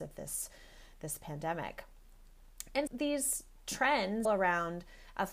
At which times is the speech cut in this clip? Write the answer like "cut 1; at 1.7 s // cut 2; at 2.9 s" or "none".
cut 1; at 2.9 s // cut 2; at 4.2 s